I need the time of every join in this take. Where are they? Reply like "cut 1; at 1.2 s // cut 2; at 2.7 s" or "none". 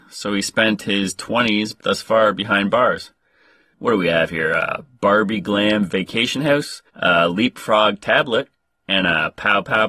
cut 1; at 1.8 s // cut 2; at 3.7 s // cut 3; at 6.9 s